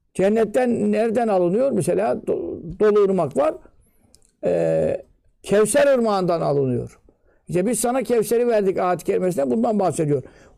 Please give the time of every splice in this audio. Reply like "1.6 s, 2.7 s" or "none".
none